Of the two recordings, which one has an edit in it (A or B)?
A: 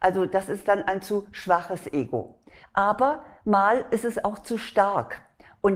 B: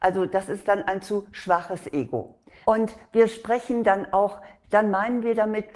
B